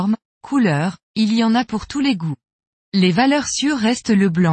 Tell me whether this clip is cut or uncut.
cut